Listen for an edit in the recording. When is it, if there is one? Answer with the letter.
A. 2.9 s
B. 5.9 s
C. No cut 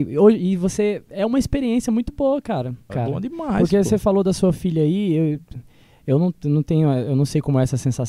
A